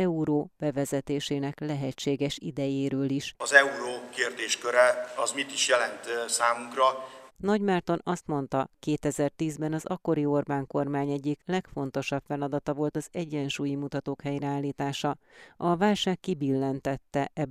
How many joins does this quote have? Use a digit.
2